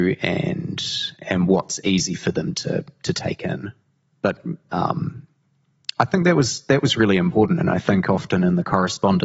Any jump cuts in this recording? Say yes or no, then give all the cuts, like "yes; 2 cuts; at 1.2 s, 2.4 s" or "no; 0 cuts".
yes; 1 cut; at 4.7 s